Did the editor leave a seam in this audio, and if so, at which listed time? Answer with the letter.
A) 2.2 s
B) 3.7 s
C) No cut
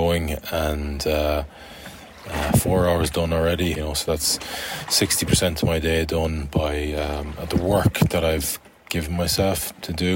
B